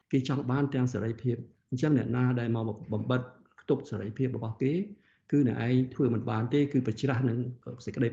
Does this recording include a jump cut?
no; 0 cuts

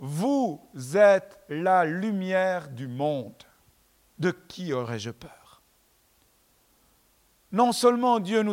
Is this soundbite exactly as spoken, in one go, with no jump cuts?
no; 1 cut; at 4.1 s

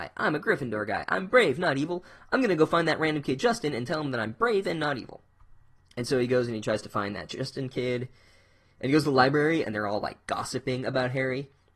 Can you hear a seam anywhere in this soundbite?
yes; 1 cut; at 9.6 s

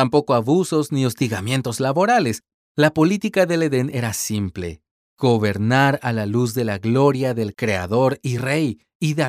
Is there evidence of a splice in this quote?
yes; 1 cut; at 2.6 s

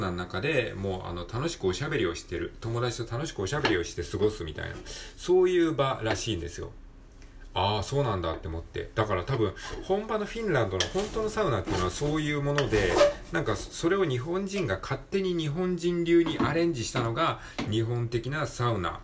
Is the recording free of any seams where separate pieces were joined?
yes; 0 cuts

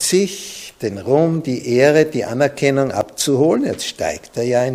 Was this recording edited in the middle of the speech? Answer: no; 0 cuts

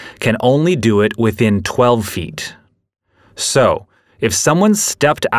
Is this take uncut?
yes; 0 cuts

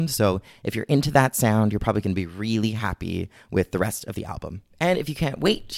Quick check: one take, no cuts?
no; 1 cut; at 4.7 s

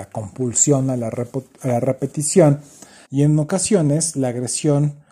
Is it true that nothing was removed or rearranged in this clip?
no; 1 cut; at 3.0 s

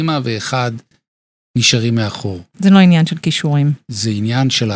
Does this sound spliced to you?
no; 0 cuts

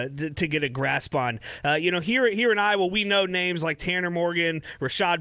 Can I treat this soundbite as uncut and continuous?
yes; 0 cuts

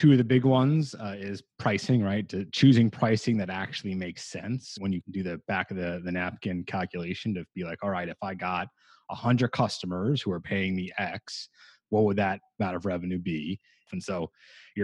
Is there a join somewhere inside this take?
yes; 1 cut; at 13.9 s

